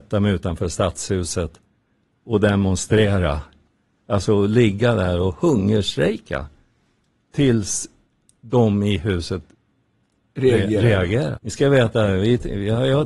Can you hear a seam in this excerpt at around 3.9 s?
no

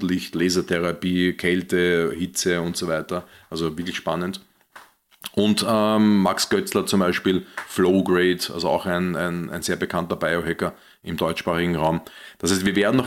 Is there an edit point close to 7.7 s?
no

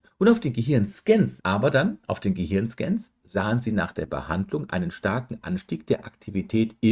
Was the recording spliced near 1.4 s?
yes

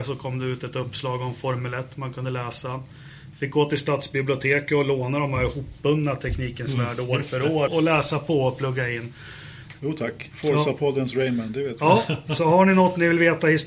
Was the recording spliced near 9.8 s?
yes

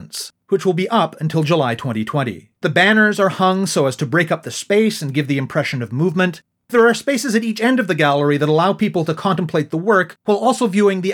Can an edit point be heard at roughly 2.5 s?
yes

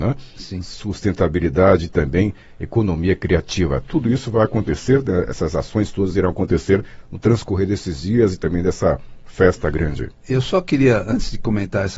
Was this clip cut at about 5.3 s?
no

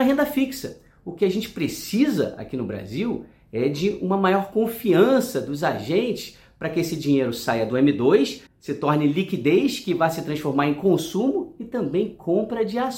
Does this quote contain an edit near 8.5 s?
yes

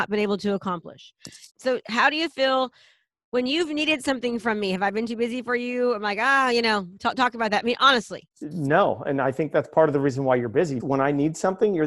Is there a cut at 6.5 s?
no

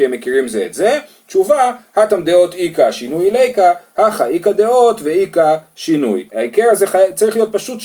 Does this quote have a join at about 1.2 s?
no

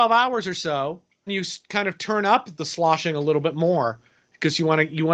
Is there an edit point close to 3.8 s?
no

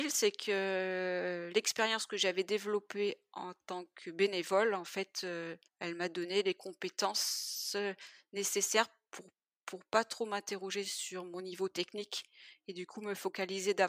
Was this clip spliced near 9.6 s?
no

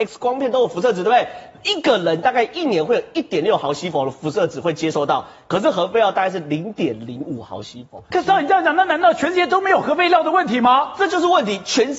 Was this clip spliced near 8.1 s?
yes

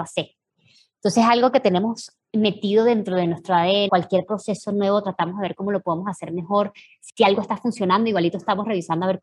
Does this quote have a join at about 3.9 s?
yes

